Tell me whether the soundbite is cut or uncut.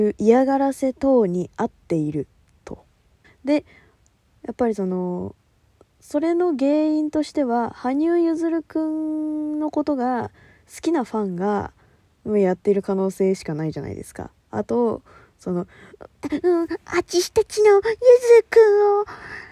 cut